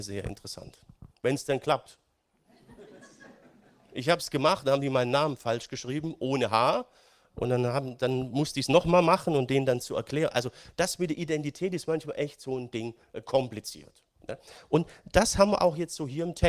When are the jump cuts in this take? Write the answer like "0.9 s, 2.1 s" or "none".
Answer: none